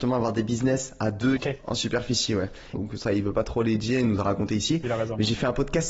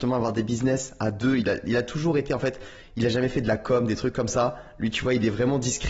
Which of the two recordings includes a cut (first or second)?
first